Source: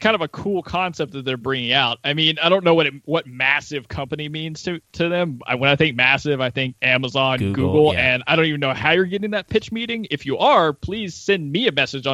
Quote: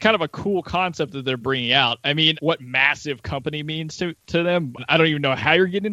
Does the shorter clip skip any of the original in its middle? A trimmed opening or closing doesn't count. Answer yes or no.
yes